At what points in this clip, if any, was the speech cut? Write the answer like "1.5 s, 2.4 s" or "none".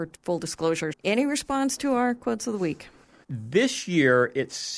0.9 s, 3.2 s